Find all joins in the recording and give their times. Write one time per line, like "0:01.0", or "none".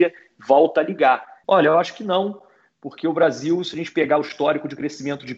0:01.4